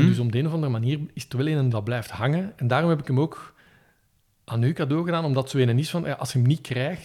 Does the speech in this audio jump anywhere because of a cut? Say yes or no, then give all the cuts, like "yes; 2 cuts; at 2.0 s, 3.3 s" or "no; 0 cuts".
yes; 1 cut; at 1.7 s